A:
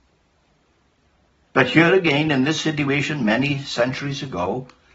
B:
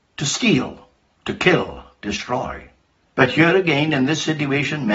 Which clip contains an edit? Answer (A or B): B